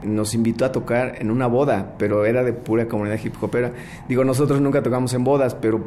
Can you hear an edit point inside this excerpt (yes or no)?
no